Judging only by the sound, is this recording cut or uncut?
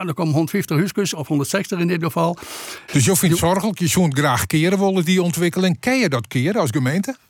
cut